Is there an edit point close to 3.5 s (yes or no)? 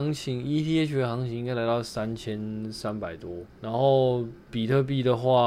yes